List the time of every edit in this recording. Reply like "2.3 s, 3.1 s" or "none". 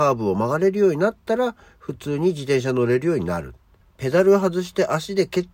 3.8 s